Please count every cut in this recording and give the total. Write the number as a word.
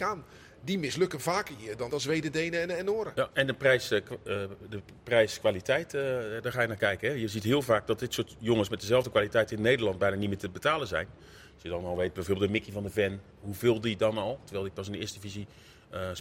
one